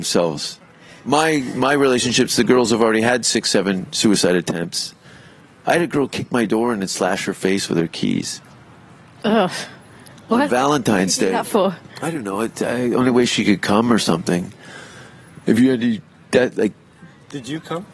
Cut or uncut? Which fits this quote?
uncut